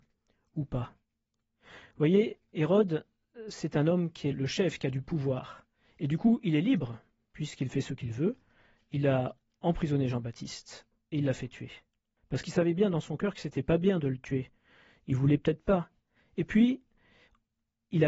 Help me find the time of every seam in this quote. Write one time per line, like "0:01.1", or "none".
0:04.3
0:12.2